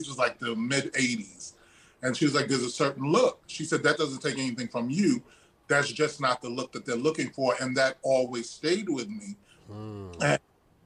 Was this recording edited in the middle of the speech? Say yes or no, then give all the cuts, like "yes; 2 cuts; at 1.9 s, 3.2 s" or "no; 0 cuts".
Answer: no; 0 cuts